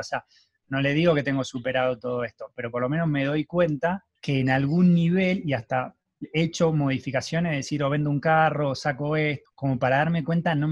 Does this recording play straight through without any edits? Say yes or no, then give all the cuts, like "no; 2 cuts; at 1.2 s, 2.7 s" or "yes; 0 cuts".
no; 2 cuts; at 4.2 s, 9.4 s